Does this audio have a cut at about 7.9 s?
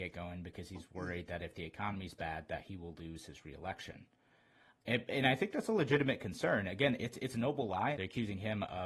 yes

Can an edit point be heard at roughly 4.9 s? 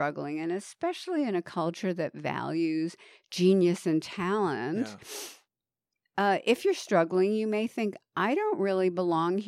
no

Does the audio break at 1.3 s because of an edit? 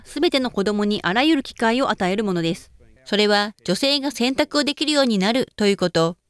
no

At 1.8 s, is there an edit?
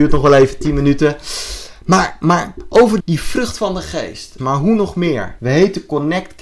no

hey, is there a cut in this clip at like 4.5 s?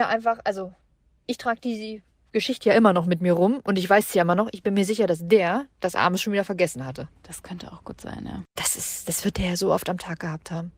no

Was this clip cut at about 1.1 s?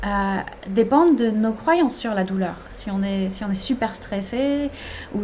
no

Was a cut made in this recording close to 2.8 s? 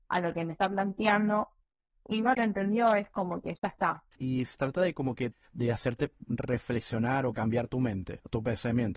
no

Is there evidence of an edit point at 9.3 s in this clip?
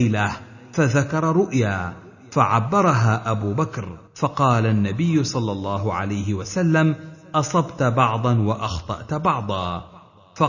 no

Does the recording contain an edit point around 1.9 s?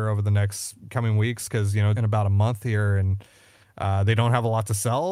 yes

